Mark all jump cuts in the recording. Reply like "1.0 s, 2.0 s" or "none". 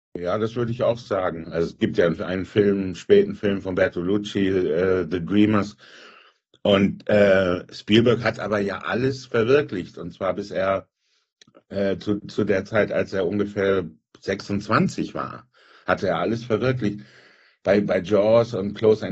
1.4 s